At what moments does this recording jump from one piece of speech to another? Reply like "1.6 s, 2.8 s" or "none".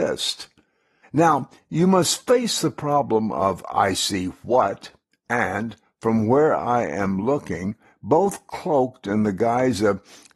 1.0 s